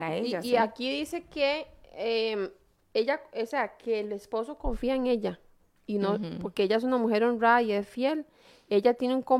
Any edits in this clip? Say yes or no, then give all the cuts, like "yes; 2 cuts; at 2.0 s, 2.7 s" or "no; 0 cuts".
no; 0 cuts